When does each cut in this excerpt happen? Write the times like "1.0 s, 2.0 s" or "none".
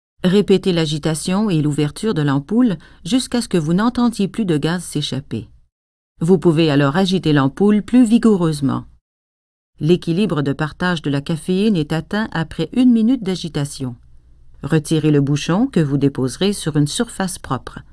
14.5 s